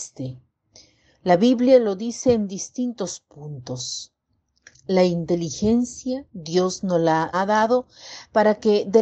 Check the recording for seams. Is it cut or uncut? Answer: cut